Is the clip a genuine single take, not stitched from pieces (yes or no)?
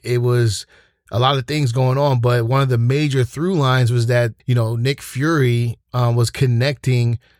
no